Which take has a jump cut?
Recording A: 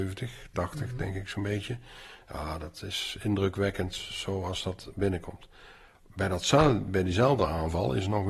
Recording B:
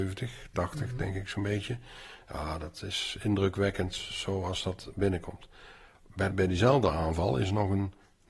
B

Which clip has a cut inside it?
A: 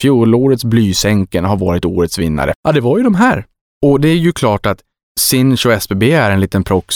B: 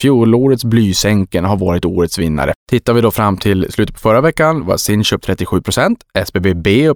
A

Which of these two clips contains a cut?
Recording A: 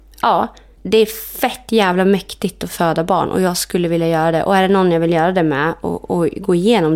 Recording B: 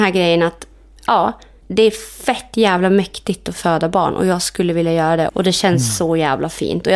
B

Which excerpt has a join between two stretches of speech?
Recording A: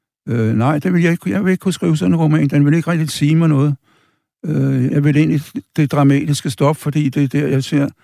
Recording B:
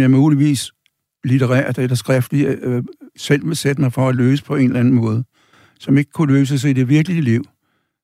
A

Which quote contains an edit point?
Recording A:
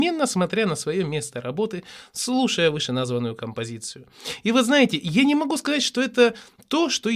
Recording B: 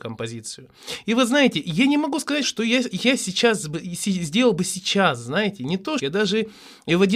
B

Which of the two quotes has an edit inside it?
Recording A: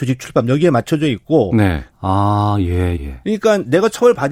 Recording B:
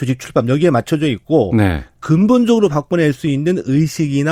A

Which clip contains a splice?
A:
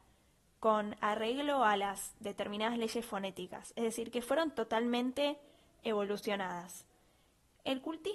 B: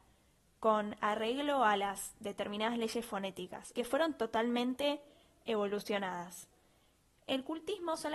B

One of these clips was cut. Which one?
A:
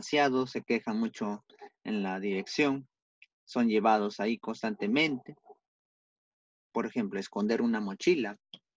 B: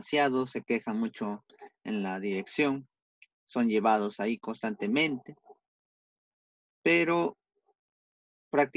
A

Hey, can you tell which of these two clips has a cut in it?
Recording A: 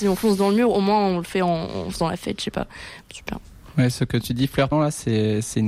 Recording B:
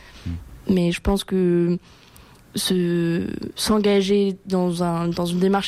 A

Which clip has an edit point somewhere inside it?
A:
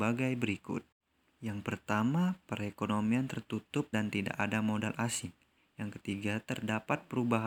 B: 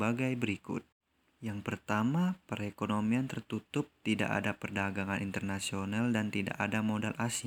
A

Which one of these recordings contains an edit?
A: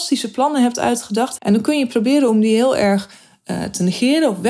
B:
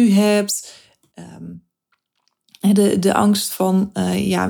A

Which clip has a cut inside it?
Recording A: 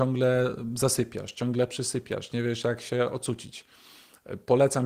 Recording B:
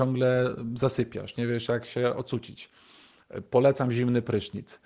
B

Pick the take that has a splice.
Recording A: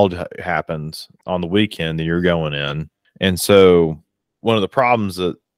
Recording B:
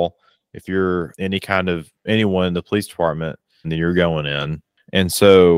B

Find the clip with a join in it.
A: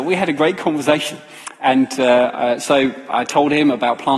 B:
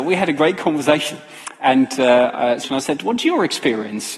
B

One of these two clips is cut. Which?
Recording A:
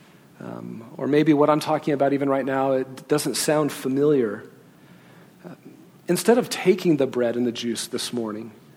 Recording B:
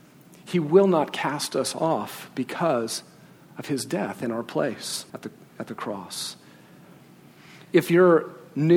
B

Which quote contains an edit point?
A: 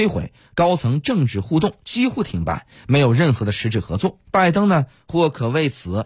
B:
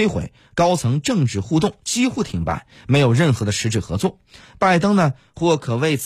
A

